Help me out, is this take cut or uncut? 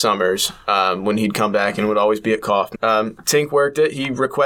cut